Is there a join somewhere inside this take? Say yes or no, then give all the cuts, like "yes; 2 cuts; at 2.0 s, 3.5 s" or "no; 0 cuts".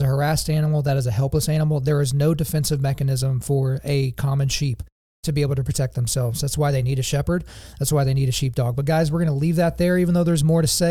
no; 0 cuts